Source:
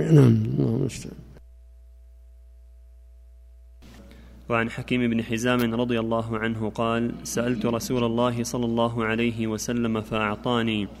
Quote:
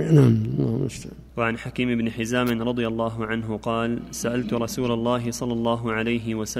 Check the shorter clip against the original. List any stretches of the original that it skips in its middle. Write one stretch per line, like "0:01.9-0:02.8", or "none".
0:01.3-0:04.4